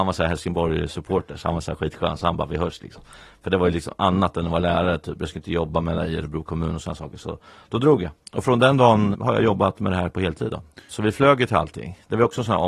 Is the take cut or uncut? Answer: cut